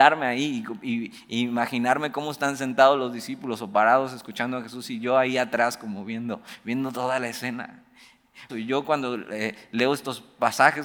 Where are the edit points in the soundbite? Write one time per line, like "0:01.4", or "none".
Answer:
0:08.5

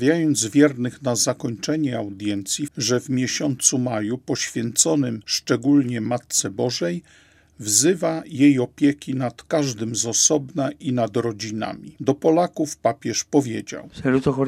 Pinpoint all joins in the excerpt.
0:02.7
0:12.0

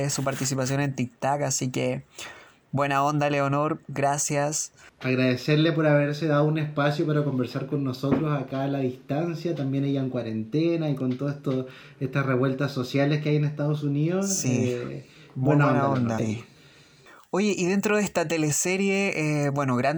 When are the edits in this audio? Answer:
0:16.2

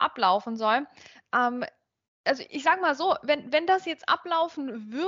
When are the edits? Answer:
0:02.0

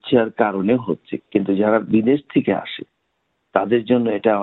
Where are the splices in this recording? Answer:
0:01.2

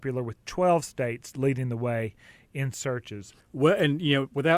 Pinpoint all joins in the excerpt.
0:03.4

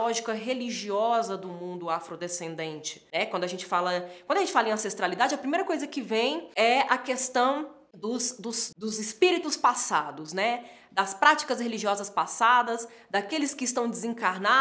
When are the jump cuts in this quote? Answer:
0:08.7

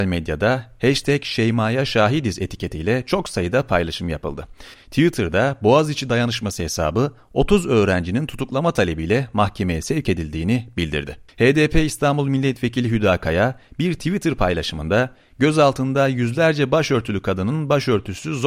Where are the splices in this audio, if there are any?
0:04.7
0:11.3

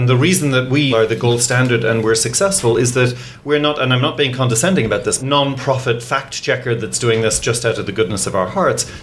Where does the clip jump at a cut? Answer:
0:00.9
0:05.2

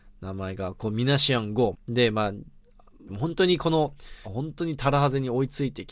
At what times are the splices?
0:01.7
0:03.1
0:04.2

